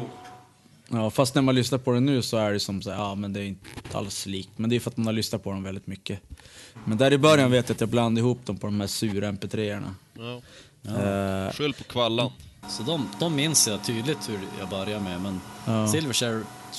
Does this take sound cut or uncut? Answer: cut